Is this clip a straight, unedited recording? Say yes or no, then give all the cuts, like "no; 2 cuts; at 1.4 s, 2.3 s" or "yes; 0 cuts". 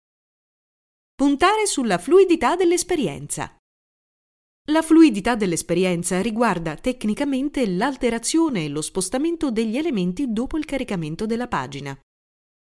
yes; 0 cuts